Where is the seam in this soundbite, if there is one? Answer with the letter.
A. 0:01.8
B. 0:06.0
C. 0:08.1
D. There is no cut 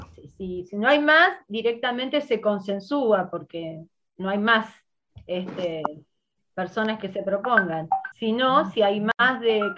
C